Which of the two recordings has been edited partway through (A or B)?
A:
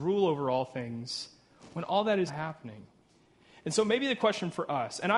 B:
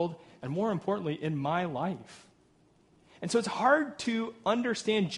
A